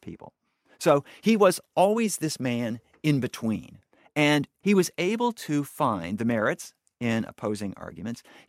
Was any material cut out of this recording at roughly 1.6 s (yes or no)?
no